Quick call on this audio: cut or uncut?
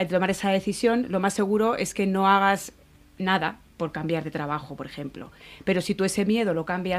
uncut